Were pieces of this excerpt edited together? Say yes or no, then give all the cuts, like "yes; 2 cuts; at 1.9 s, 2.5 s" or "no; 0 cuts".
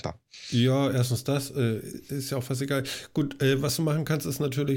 no; 0 cuts